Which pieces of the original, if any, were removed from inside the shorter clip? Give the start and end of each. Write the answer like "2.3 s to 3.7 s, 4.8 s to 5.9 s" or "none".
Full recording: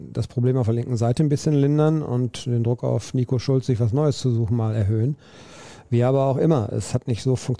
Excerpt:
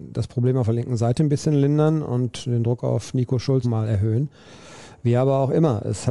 3.6 s to 4.5 s